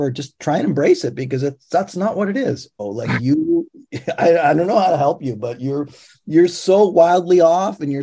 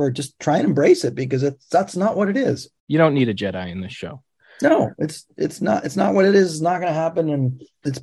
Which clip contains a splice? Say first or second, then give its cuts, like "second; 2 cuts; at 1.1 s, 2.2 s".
first; 1 cut; at 2.8 s